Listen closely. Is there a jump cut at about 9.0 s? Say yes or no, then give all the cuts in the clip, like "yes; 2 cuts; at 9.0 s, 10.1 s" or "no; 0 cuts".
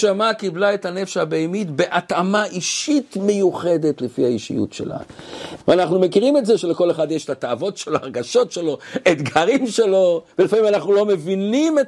no; 2 cuts; at 5.6 s, 10.3 s